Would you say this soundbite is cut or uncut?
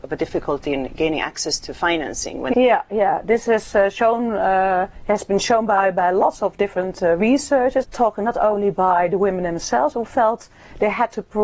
cut